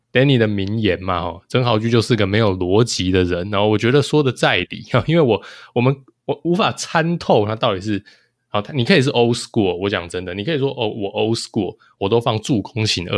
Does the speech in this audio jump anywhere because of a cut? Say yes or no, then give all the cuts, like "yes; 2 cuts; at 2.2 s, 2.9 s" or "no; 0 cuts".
no; 0 cuts